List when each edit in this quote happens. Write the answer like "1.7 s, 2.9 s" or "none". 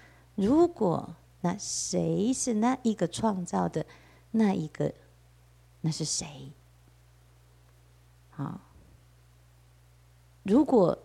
1.4 s